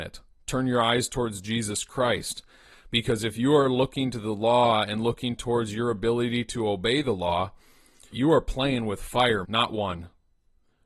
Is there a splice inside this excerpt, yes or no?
yes